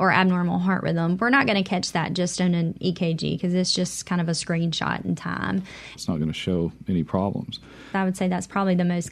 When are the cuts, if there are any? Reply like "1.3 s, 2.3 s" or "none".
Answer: 6.0 s, 7.9 s